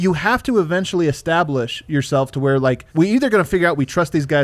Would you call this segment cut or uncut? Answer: cut